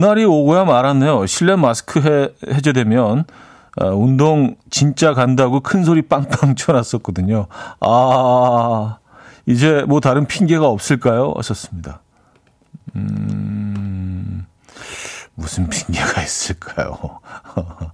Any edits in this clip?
no; 0 cuts

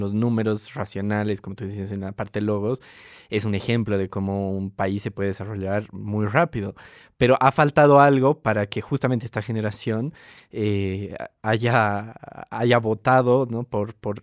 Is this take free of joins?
yes; 0 cuts

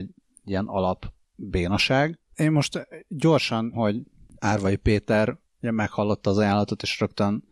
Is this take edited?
yes; 2 cuts; at 2.3 s, 3.7 s

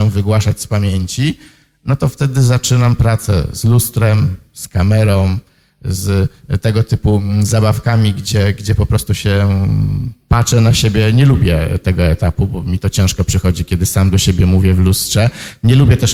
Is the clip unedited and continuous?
yes; 0 cuts

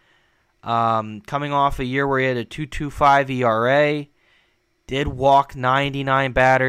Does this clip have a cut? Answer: no; 0 cuts

